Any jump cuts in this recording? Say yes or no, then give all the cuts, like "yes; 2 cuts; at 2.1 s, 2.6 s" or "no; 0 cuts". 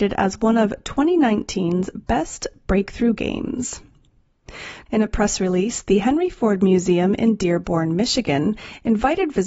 yes; 1 cut; at 4.9 s